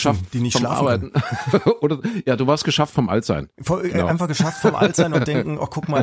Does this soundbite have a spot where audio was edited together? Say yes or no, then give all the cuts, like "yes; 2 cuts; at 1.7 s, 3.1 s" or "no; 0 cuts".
no; 0 cuts